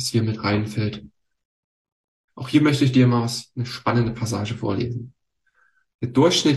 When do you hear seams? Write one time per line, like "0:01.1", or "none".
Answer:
0:02.3